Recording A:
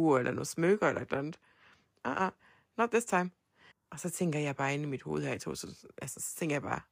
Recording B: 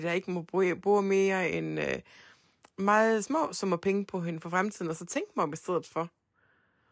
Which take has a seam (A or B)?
A